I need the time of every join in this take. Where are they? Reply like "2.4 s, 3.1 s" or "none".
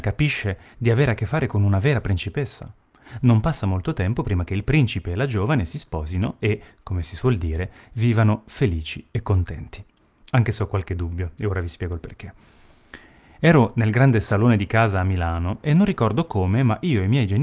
none